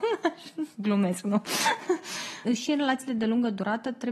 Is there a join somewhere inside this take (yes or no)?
yes